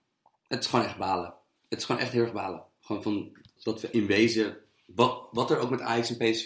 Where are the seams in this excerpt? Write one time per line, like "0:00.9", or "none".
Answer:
0:03.6